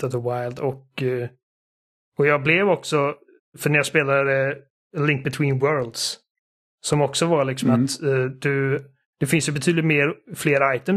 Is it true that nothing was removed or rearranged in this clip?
yes; 0 cuts

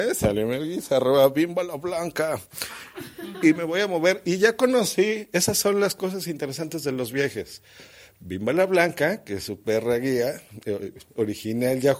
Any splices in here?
no; 0 cuts

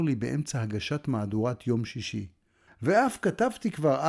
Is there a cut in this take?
yes; 1 cut; at 2.7 s

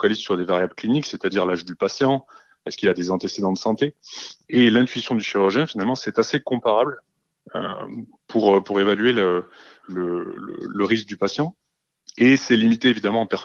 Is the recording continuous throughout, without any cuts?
yes; 0 cuts

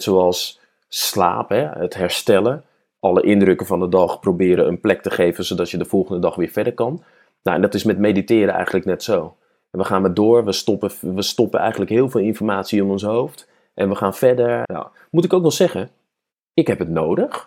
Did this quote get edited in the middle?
yes; 1 cut; at 14.6 s

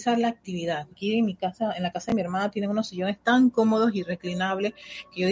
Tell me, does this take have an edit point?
yes; 1 cut; at 0.9 s

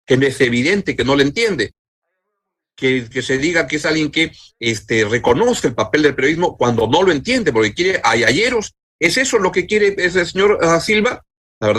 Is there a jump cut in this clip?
yes; 1 cut; at 3.1 s

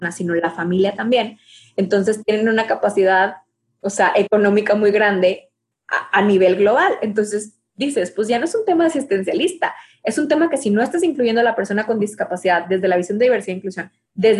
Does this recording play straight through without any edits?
yes; 0 cuts

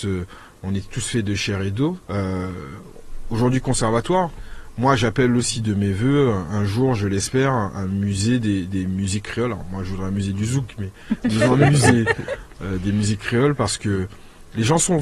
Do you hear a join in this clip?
yes; 1 cut; at 2.0 s

